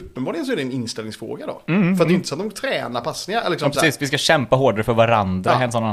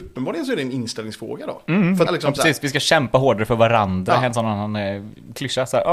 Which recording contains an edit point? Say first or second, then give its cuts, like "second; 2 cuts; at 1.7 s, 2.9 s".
second; 1 cut; at 2.1 s